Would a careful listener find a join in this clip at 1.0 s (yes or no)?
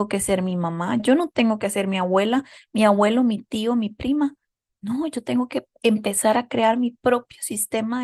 yes